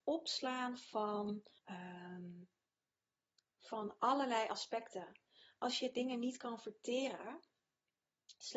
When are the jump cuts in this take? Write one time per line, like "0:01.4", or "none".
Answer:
0:01.6